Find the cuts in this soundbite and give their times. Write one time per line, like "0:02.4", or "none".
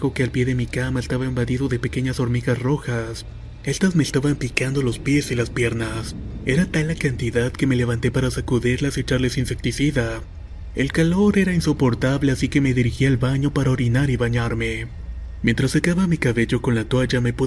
none

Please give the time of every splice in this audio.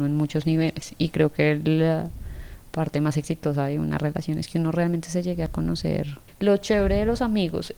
0:06.3

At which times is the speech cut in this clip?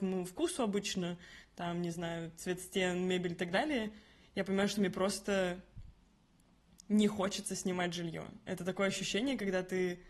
none

